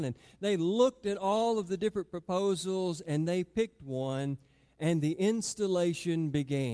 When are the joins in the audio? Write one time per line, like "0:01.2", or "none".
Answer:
none